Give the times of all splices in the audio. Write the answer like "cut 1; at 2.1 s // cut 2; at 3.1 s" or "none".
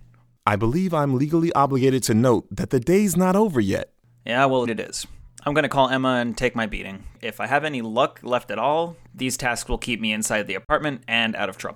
cut 1; at 4.6 s // cut 2; at 7.2 s

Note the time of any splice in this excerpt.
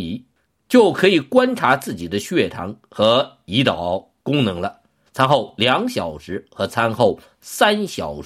cut 1; at 5.1 s

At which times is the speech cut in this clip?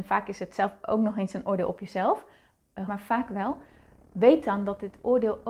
cut 1; at 2.9 s

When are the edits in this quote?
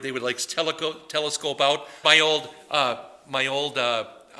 cut 1; at 2.0 s

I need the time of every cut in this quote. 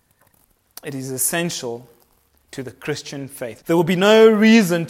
cut 1; at 3.6 s

